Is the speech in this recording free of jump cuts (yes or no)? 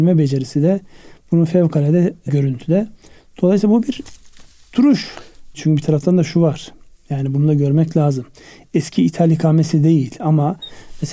no